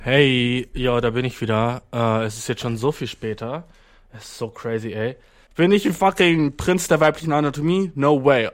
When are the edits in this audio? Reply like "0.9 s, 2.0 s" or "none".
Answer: 5.5 s